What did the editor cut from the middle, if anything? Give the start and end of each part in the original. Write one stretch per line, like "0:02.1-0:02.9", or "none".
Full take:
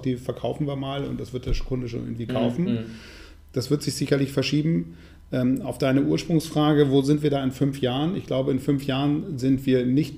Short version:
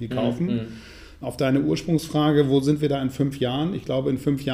0:03.4-0:05.6